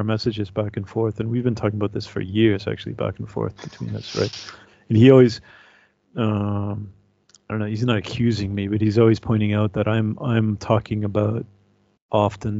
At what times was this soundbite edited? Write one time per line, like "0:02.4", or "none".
none